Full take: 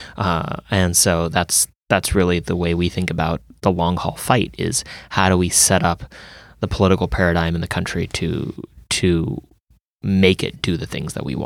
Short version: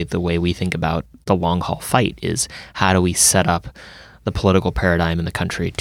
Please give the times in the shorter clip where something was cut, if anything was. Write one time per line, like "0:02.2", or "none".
none